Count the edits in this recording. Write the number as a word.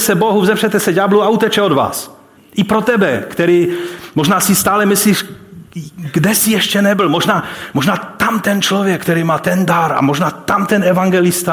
one